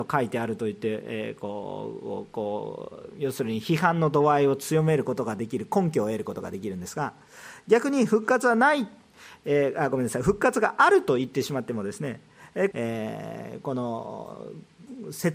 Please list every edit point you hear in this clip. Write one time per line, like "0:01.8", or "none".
0:12.7